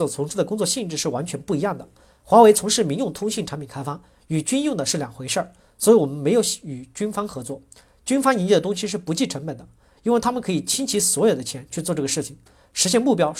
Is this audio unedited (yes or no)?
yes